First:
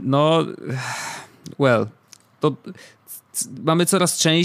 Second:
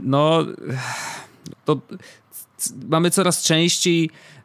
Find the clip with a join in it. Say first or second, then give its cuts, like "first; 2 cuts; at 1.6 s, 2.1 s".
second; 1 cut; at 1.5 s